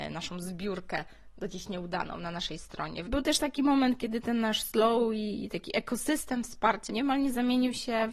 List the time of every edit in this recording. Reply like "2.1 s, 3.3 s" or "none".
3.0 s, 6.9 s